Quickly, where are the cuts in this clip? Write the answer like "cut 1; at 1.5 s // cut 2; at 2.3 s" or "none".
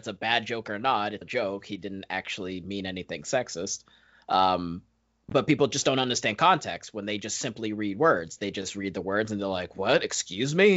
cut 1; at 1.2 s